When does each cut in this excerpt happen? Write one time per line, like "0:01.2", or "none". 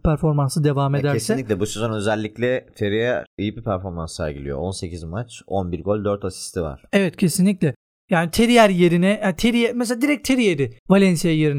none